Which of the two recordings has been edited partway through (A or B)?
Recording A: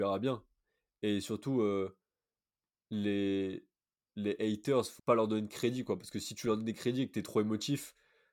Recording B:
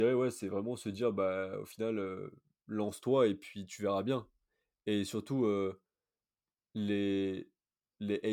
A